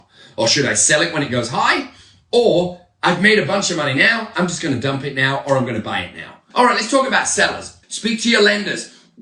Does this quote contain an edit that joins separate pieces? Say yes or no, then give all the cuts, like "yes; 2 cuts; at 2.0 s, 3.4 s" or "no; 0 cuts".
yes; 2 cuts; at 6.5 s, 7.8 s